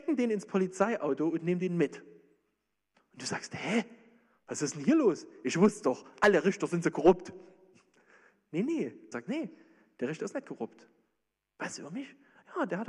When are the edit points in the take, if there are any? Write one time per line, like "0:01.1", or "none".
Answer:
0:09.1
0:11.5